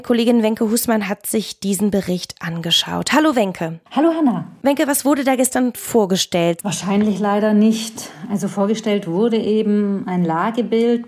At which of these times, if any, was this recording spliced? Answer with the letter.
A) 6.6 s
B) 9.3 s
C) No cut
A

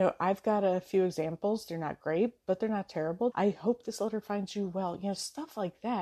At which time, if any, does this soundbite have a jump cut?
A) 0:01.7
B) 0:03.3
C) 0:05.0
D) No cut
B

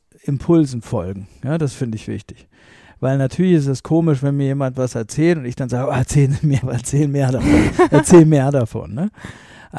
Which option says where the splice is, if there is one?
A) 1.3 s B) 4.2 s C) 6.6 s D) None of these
C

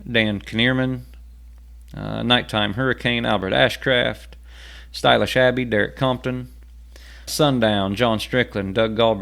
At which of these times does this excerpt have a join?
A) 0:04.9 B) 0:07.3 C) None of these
B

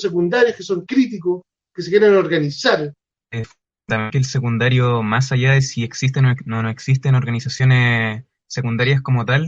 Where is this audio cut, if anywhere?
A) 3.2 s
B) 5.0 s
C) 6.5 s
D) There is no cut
A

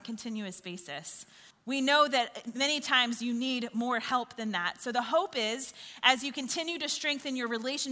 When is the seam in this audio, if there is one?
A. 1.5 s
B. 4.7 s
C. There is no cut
A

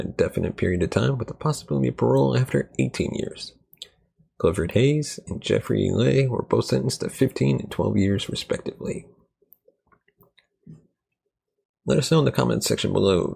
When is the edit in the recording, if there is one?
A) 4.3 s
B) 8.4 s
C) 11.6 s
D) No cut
D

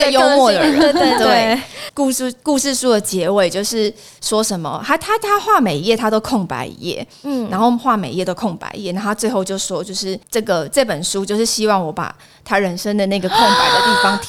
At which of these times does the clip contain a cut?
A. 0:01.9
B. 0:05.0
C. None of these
A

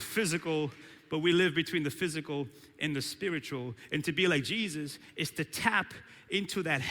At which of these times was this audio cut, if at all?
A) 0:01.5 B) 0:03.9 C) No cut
C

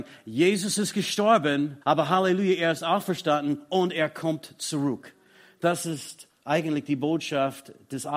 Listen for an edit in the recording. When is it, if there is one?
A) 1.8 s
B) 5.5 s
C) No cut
A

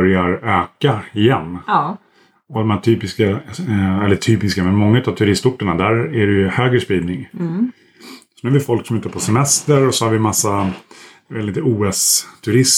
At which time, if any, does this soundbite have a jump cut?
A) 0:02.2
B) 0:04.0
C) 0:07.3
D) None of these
D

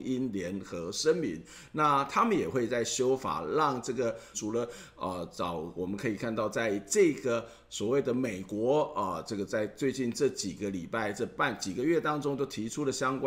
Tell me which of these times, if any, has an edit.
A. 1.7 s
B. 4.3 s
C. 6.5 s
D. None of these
B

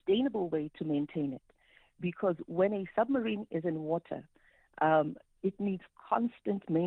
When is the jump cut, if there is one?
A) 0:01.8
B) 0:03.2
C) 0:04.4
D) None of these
D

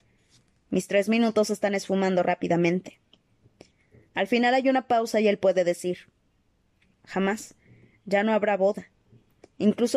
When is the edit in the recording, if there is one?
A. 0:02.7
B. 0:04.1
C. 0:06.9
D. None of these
C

